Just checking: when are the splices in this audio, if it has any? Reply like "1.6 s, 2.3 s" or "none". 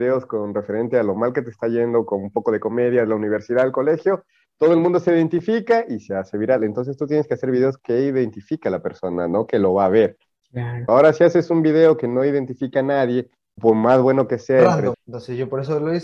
10.9 s, 13.6 s, 14.9 s